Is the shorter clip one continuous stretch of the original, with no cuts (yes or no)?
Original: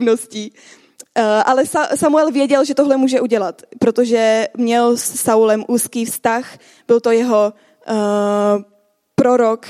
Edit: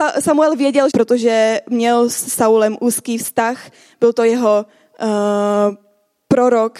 no